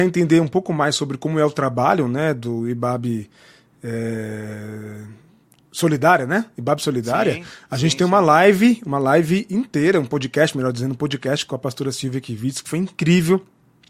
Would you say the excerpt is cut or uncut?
uncut